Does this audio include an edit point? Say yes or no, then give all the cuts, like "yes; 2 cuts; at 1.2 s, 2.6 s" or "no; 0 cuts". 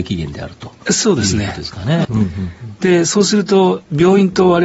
yes; 1 cut; at 2.0 s